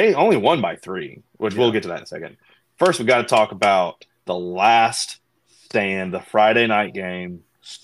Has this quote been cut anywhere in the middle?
no; 0 cuts

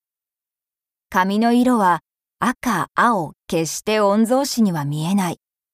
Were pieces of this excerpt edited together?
yes; 1 cut; at 3.4 s

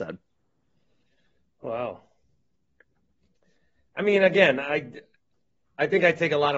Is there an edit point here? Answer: no; 0 cuts

